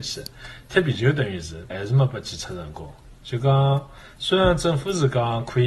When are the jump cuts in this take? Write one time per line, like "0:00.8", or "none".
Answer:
0:01.7